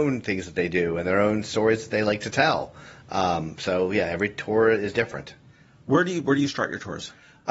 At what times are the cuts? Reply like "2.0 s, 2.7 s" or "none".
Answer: none